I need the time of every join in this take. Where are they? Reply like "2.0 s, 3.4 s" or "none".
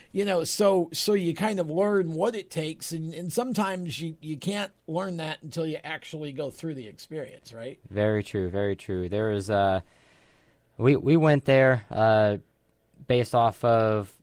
none